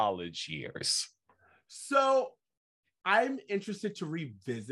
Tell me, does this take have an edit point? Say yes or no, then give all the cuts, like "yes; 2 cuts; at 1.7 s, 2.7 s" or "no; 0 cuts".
no; 0 cuts